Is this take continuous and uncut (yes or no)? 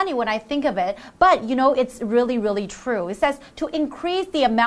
yes